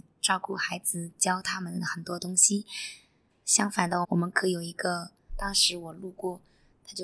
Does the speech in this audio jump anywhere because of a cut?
yes; 2 cuts; at 4.0 s, 5.3 s

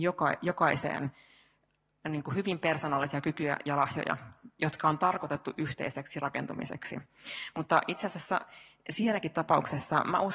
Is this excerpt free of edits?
yes; 0 cuts

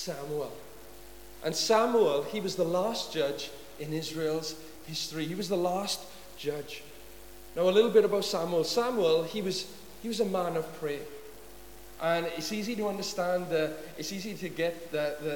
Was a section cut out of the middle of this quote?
no; 0 cuts

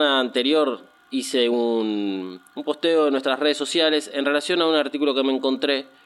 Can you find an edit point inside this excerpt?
no; 0 cuts

